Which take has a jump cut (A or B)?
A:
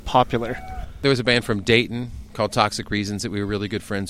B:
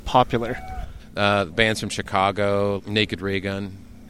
B